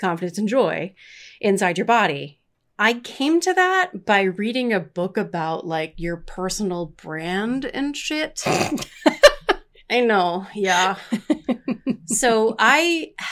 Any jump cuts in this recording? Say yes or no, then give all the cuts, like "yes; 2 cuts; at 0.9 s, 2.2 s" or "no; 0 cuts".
no; 0 cuts